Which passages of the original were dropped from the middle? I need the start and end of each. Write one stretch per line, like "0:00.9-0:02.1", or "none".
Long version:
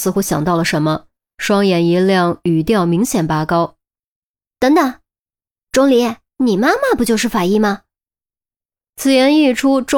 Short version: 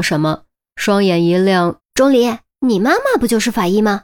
0:02.4-0:05.6